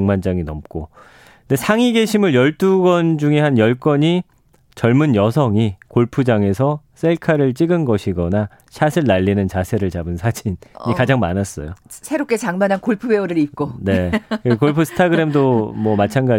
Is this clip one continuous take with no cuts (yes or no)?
yes